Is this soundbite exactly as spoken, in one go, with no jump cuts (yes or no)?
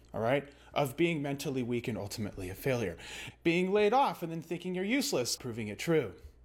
no